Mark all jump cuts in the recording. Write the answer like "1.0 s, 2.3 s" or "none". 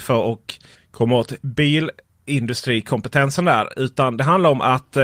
none